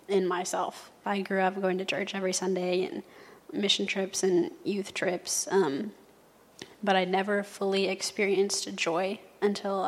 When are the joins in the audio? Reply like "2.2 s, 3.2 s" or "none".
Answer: 1.0 s